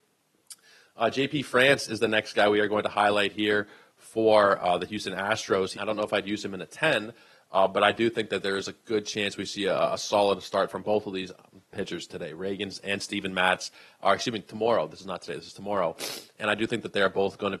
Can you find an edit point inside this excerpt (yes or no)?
yes